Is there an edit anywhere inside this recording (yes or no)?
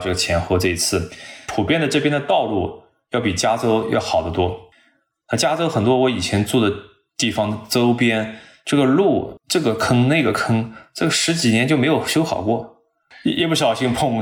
no